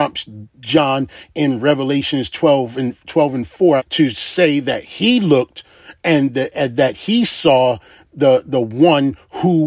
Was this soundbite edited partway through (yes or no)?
yes